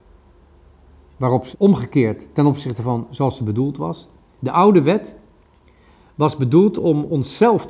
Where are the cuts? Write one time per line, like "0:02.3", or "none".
0:01.5